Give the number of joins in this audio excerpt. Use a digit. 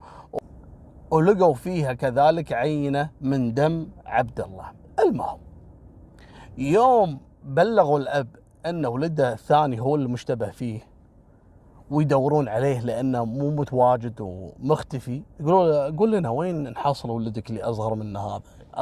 2